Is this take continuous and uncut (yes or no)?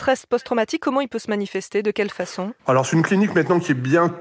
no